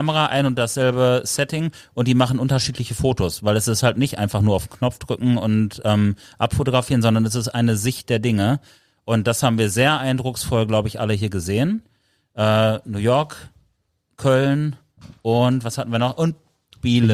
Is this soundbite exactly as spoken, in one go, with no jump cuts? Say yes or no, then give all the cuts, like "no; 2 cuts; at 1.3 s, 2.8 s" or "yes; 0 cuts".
yes; 0 cuts